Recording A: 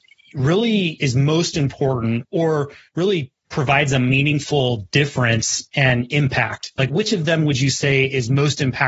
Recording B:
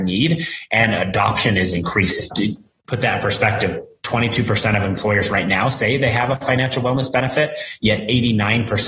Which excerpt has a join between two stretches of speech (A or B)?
A